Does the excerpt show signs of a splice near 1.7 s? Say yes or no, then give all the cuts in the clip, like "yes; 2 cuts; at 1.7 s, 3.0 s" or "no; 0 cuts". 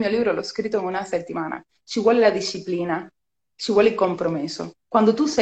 no; 0 cuts